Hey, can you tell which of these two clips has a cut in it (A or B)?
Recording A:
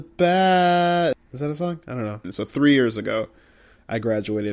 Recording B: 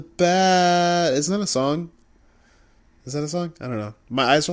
A